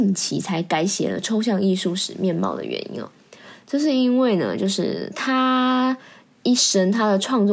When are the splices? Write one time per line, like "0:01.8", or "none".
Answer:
none